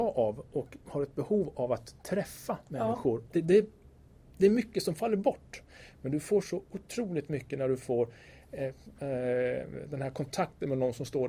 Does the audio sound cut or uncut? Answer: cut